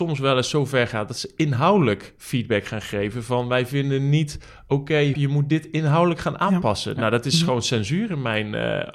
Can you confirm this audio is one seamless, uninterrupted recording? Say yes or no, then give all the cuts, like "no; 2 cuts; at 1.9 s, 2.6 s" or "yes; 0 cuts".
no; 1 cut; at 5.1 s